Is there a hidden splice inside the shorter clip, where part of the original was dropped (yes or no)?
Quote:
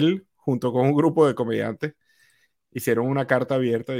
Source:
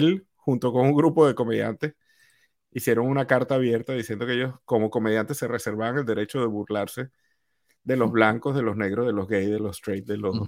no